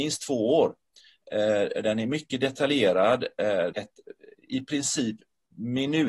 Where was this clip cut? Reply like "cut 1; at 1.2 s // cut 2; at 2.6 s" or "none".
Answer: cut 1; at 3.7 s